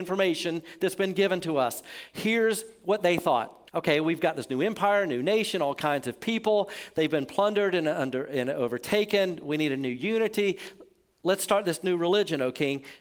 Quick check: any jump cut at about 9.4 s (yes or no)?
no